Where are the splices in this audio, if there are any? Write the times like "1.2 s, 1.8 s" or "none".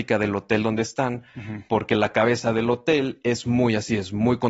none

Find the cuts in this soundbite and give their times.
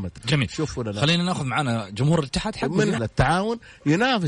3.0 s

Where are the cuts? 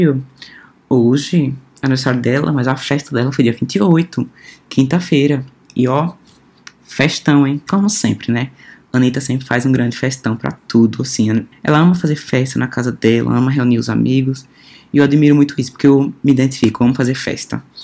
11.5 s

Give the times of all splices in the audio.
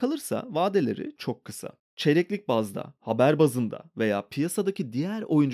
1.2 s

